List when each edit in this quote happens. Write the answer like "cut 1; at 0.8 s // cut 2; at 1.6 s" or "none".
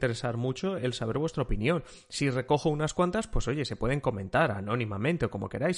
none